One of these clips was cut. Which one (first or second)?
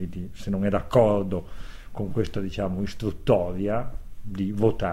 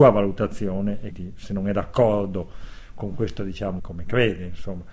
second